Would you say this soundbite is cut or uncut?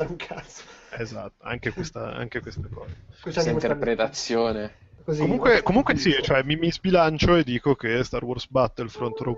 uncut